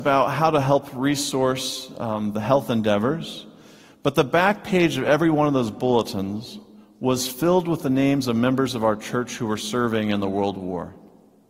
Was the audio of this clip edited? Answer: no; 0 cuts

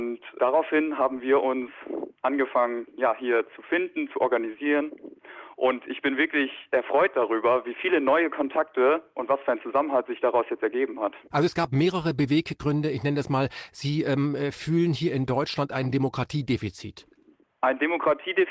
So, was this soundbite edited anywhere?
no; 0 cuts

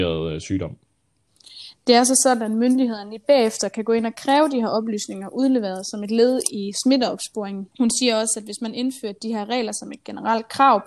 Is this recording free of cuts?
no; 1 cut; at 7.7 s

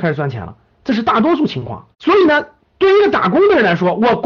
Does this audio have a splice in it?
yes; 1 cut; at 1.9 s

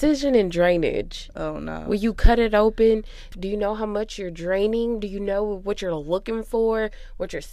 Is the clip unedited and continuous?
no; 1 cut; at 3.3 s

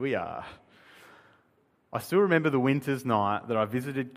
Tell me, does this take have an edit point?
no; 0 cuts

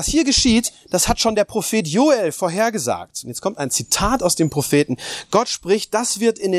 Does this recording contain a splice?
no; 0 cuts

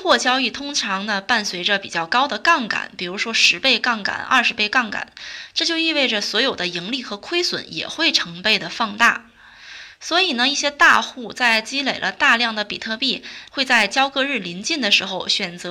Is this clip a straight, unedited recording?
no; 1 cut; at 13.5 s

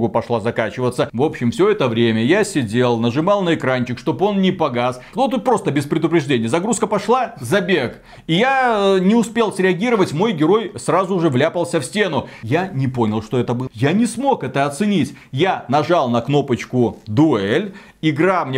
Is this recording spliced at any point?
yes; 2 cuts; at 5.1 s, 13.7 s

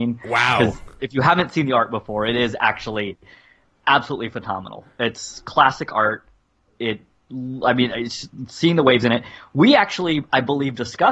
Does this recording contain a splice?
no; 0 cuts

